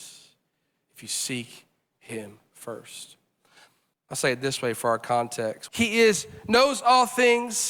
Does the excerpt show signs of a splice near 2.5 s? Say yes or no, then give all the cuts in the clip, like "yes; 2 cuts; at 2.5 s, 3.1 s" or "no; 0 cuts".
no; 2 cuts; at 3.9 s, 5.7 s